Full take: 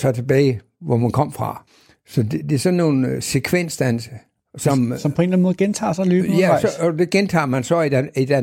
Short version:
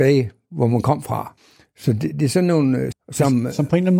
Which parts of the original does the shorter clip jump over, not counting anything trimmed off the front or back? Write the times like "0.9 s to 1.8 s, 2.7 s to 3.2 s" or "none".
3.2 s to 4.4 s